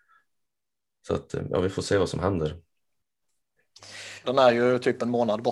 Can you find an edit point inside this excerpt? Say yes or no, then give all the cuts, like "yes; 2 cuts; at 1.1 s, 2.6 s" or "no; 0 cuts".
yes; 1 cut; at 4.2 s